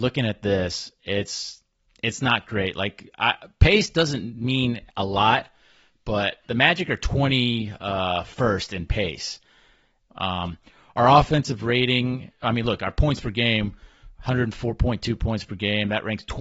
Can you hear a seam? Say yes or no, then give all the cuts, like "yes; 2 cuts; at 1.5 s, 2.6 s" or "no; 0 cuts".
yes; 1 cut; at 10.1 s